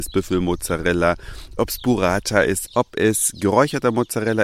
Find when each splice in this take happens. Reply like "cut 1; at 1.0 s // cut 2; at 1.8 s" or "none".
cut 1; at 2.6 s